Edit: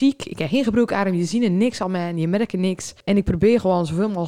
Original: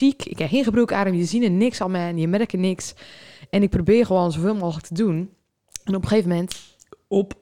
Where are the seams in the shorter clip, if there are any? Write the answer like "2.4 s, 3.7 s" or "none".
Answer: 3.0 s